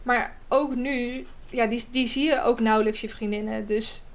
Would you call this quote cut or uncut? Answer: cut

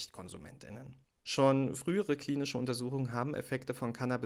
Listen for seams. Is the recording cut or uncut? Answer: cut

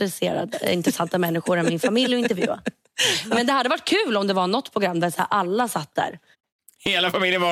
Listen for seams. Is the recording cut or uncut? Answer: uncut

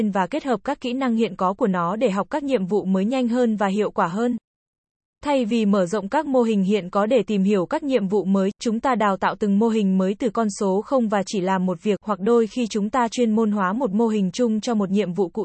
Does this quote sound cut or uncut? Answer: cut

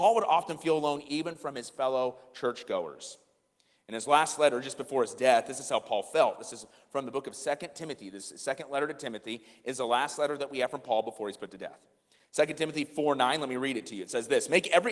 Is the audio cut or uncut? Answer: uncut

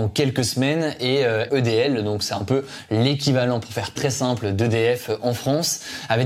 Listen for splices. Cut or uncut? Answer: cut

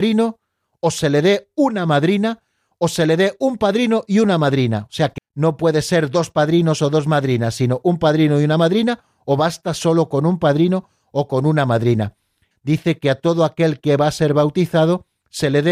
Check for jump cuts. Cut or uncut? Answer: cut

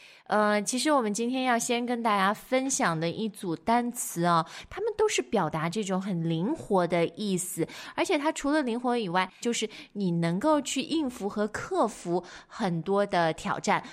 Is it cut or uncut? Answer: cut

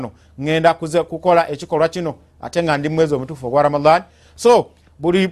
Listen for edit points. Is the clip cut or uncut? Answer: uncut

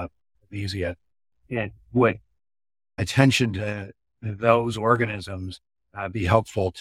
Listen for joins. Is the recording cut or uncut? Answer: uncut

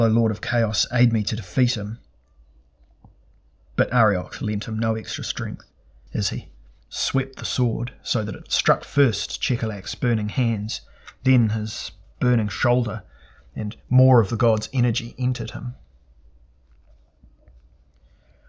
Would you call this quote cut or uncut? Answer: cut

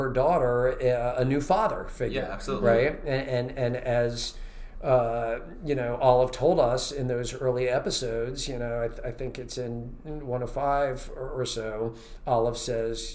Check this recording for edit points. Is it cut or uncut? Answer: uncut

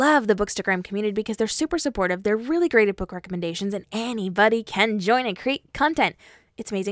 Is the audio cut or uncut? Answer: cut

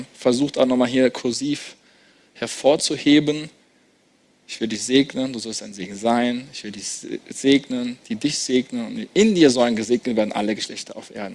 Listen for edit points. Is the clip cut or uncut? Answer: uncut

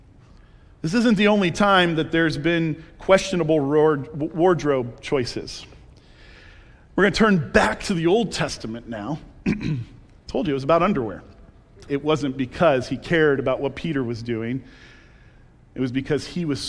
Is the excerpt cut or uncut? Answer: cut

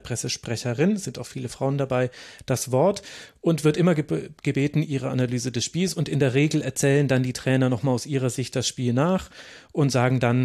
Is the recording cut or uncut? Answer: cut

